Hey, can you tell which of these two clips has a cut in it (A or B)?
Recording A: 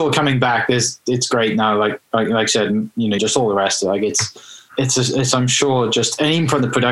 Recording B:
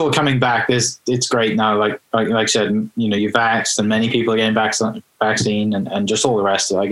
A